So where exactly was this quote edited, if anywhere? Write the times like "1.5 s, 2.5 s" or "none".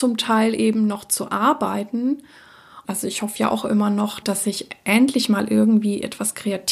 2.8 s, 4.2 s